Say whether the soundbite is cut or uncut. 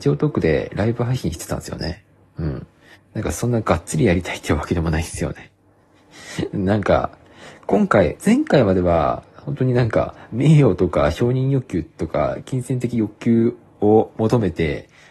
cut